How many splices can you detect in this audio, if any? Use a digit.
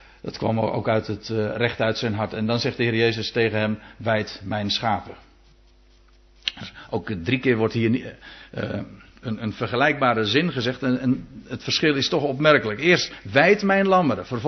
0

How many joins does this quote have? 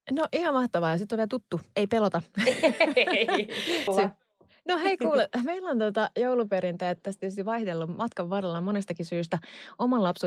1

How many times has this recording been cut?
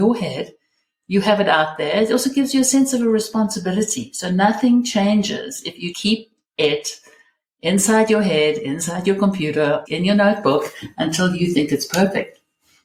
2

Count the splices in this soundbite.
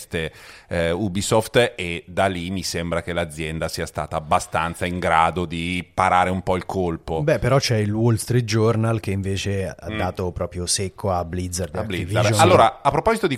0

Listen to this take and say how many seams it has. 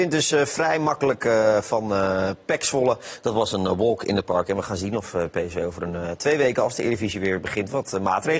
0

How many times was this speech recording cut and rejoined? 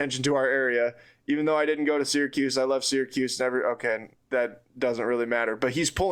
1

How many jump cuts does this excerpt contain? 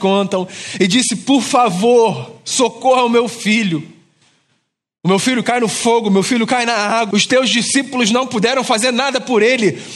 1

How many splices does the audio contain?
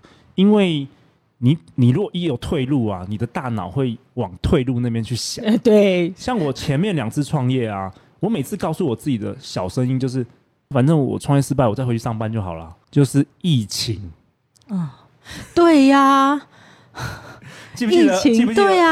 2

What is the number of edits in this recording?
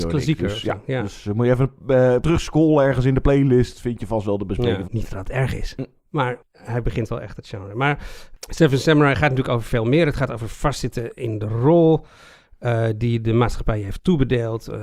1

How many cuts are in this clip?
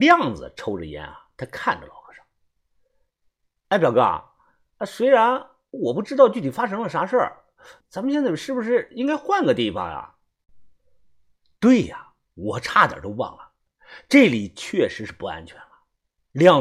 1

